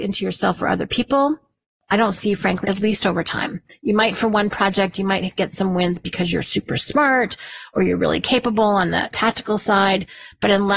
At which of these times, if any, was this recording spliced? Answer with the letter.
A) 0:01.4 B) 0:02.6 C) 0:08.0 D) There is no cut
B